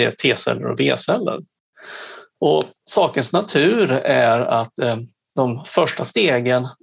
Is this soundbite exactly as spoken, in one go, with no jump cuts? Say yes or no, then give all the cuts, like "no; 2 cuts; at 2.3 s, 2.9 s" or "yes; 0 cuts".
no; 1 cut; at 2.8 s